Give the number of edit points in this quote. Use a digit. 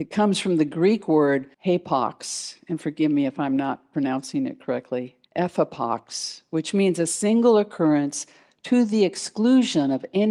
2